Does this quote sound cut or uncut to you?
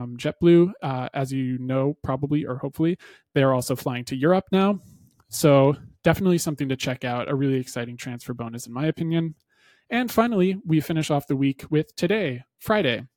uncut